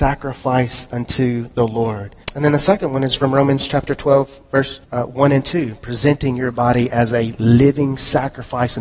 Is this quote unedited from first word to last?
no; 2 cuts; at 2.2 s, 4.8 s

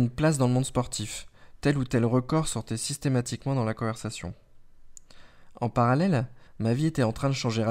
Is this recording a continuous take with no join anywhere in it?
no; 1 cut; at 6.5 s

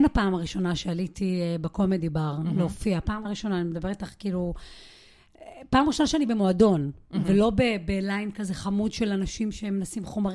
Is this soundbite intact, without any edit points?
no; 1 cut; at 3.2 s

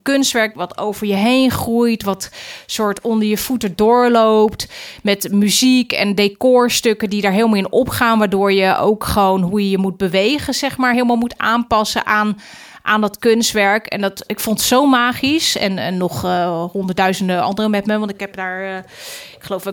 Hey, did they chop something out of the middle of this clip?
no; 0 cuts

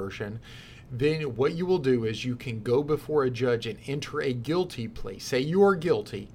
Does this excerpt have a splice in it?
no; 0 cuts

